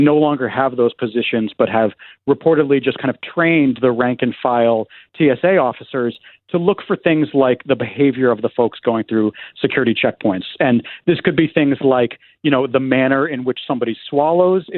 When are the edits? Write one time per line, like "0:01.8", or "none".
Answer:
none